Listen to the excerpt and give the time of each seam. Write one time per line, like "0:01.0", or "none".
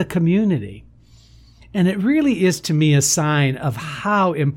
none